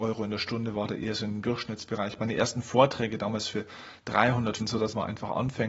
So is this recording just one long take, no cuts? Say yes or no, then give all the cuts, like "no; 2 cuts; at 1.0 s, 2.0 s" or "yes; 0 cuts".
no; 1 cut; at 4.6 s